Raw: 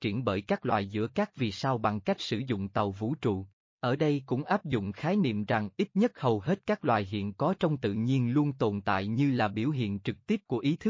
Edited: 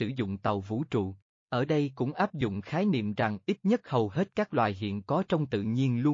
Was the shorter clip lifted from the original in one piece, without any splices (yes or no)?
yes